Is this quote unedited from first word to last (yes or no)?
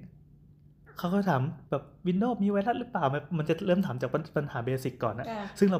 no